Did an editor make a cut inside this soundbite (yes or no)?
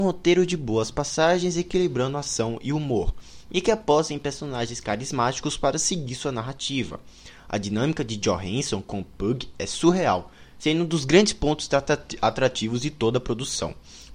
no